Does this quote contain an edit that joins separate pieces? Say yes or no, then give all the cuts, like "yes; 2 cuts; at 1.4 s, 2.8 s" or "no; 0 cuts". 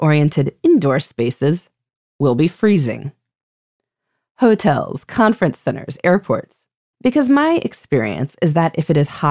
yes; 1 cut; at 6.9 s